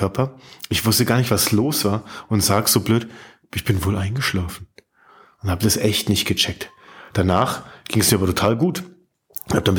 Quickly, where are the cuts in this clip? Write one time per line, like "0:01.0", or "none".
none